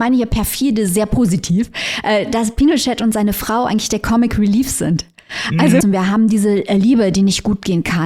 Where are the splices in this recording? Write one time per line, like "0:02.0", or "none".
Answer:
0:05.8